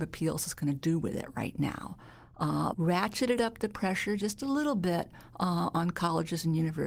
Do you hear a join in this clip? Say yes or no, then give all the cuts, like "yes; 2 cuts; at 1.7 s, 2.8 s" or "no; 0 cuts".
yes; 1 cut; at 2.7 s